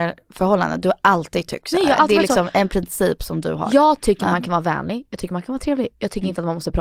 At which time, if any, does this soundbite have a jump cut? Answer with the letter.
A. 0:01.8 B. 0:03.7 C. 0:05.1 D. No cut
D